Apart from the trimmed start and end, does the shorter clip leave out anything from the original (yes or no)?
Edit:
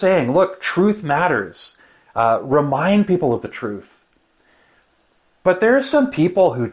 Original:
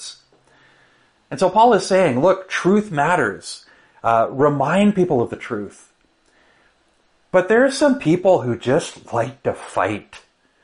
no